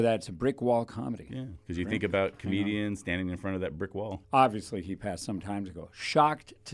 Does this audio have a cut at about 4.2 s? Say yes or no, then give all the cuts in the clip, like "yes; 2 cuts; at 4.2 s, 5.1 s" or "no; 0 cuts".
yes; 1 cut; at 4.2 s